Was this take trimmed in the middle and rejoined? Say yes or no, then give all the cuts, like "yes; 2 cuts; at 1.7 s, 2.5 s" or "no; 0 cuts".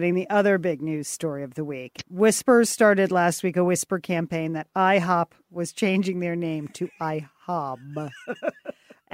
no; 0 cuts